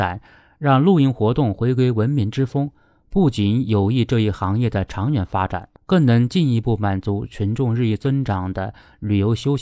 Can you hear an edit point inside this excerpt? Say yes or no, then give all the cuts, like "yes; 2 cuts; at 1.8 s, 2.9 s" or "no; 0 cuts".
yes; 1 cut; at 5.8 s